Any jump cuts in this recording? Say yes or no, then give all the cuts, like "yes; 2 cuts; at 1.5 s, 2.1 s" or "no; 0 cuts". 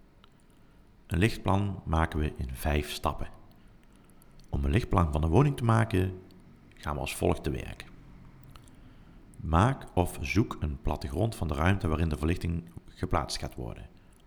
no; 0 cuts